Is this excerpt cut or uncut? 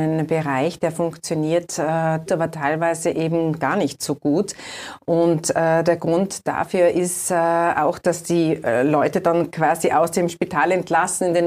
cut